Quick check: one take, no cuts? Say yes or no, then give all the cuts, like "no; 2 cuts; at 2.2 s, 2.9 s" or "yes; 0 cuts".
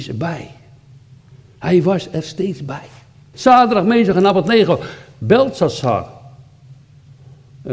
no; 1 cut; at 3.3 s